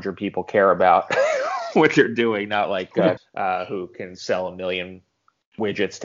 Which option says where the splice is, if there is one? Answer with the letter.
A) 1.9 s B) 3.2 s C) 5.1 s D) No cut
B